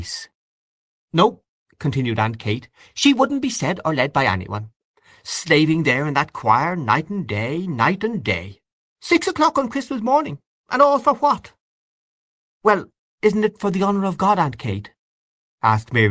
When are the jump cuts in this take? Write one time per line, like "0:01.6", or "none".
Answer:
none